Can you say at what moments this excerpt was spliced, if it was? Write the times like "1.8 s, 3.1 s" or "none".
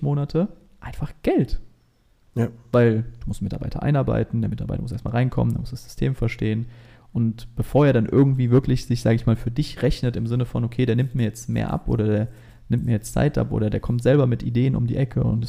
none

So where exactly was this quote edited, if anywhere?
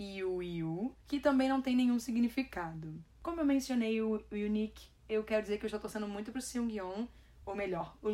none

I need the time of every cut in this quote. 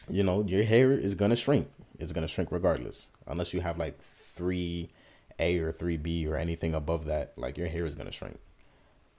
none

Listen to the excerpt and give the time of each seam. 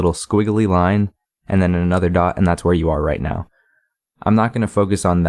none

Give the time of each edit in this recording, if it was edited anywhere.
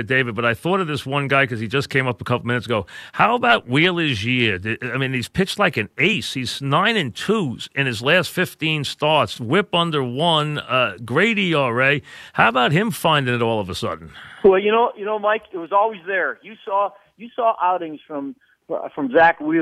none

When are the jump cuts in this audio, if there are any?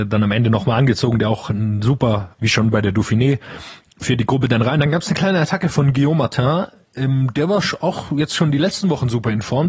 2.4 s

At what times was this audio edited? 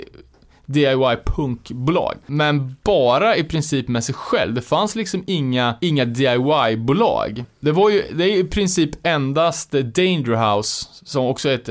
2.2 s

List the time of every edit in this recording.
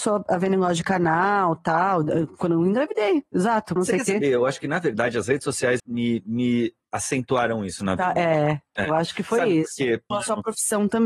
3.8 s, 5.8 s, 10.1 s

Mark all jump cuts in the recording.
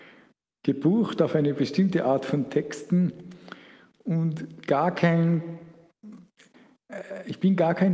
none

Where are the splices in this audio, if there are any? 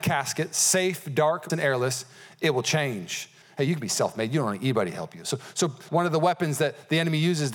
1.5 s, 3.4 s, 5.9 s

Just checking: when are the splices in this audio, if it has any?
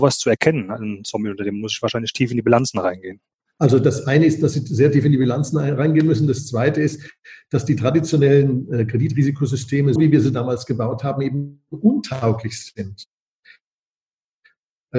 10.0 s

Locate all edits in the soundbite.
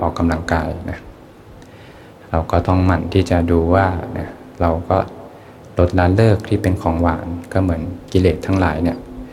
none

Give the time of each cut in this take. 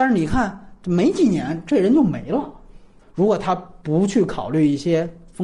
3.0 s

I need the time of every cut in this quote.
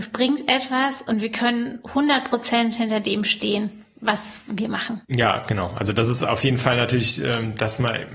5.0 s

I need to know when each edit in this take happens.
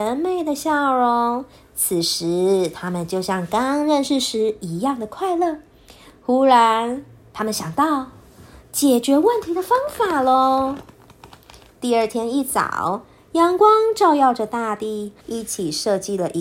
15.2 s

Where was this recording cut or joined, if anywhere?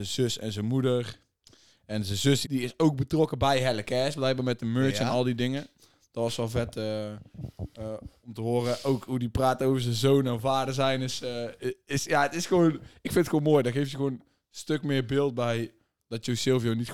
2.4 s

